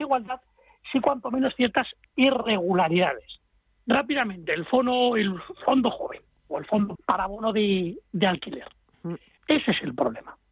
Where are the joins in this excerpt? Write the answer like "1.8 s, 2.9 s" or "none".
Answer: 7.0 s, 9.4 s